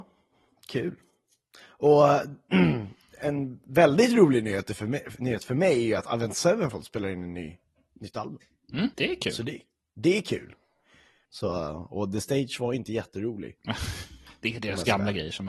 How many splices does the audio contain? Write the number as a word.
two